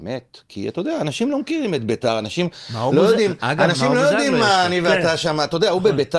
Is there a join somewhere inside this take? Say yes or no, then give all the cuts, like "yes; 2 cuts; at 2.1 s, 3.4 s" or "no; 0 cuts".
no; 0 cuts